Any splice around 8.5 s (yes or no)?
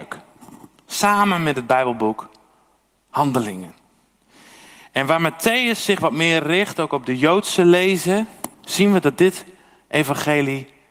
yes